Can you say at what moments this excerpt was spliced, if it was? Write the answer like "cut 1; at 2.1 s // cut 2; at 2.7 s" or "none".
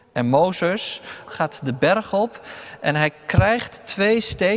cut 1; at 1.3 s